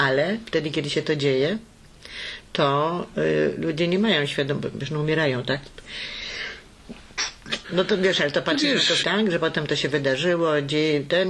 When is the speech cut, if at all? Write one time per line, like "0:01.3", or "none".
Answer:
0:07.6
0:09.0